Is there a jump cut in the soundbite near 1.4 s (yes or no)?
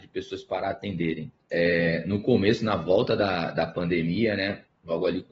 no